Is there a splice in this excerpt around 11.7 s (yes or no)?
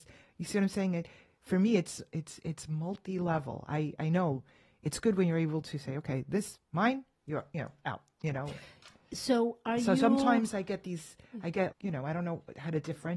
yes